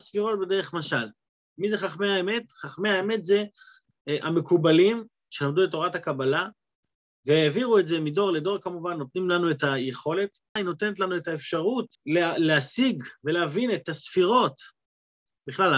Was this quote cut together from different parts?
yes; 2 cuts; at 10.6 s, 11.9 s

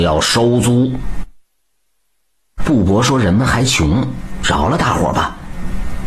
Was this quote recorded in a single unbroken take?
yes; 0 cuts

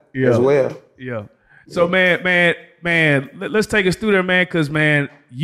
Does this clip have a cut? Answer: no; 0 cuts

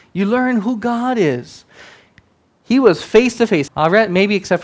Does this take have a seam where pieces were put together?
yes; 1 cut; at 3.7 s

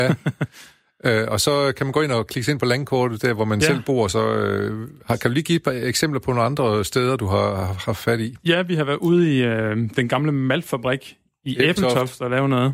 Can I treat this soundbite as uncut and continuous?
yes; 0 cuts

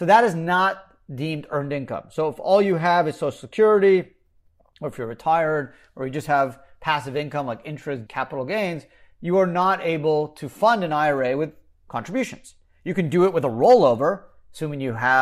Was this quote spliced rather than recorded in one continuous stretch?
yes; 1 cut; at 8.1 s

